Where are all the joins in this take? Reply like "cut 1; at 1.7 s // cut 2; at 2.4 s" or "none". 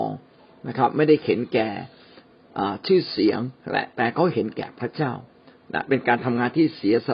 cut 1; at 3.6 s

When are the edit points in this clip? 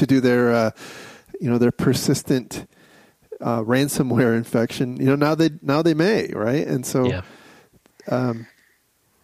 none

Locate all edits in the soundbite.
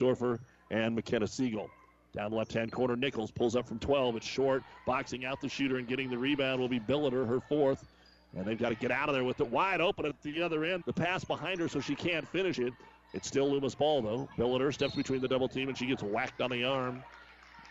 cut 1; at 10.8 s

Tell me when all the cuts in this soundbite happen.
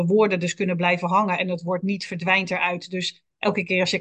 none

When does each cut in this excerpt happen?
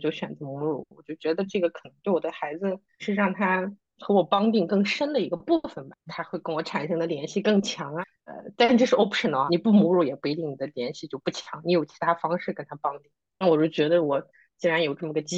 none

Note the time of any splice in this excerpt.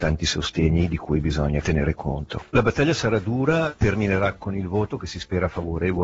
none

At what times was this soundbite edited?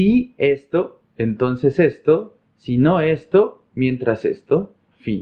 none

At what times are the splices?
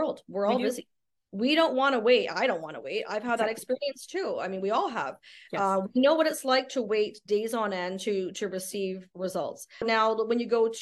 cut 1; at 9.8 s

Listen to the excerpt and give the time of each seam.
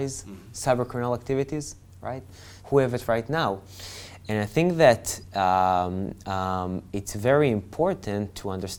cut 1; at 2.6 s

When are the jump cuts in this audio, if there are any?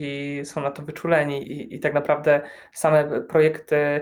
cut 1; at 1.4 s

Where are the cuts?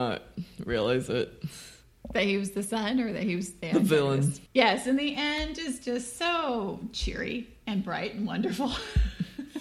cut 1; at 4.5 s

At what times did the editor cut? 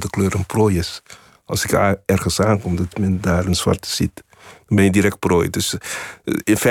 none

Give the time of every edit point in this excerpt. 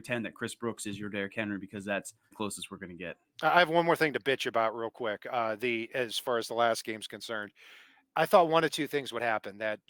cut 1; at 2.3 s

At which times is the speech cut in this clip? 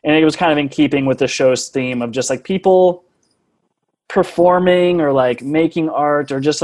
none

